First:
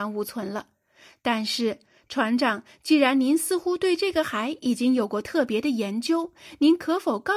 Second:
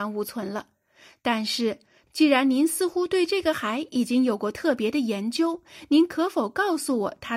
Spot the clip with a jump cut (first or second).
second